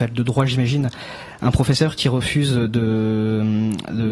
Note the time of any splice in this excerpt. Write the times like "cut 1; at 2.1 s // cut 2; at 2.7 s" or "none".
none

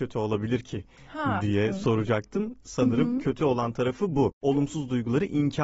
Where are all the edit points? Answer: none

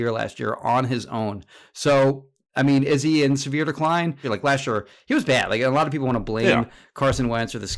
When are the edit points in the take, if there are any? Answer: cut 1; at 4.2 s

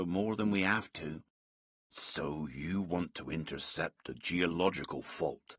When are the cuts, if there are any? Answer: none

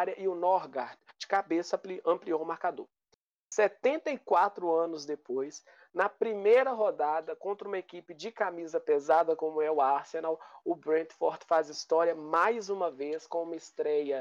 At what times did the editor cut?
none

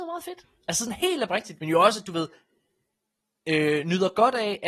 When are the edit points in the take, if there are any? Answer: cut 1; at 1.6 s

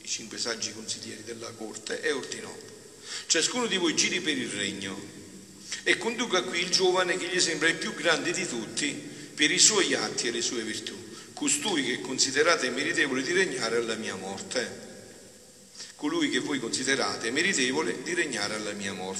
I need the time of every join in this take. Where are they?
none

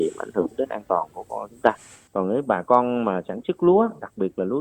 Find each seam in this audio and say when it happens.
none

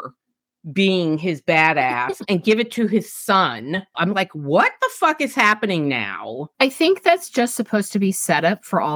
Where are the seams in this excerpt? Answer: cut 1; at 3.9 s // cut 2; at 6.5 s

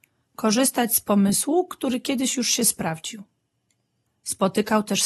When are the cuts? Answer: cut 1; at 4.1 s

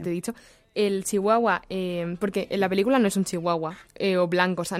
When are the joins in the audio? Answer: cut 1; at 3.9 s

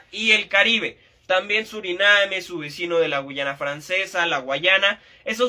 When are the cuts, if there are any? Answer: none

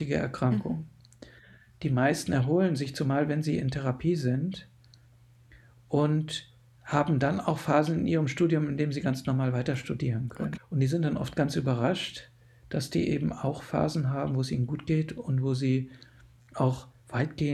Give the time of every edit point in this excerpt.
cut 1; at 10.6 s

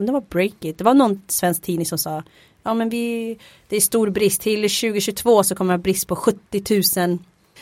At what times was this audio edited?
none

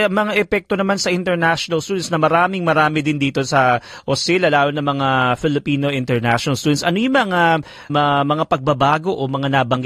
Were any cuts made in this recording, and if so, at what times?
cut 1; at 7.9 s

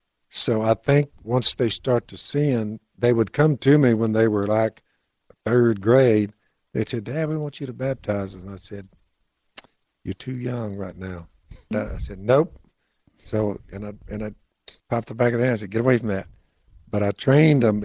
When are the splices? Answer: cut 1; at 11.7 s // cut 2; at 14.8 s

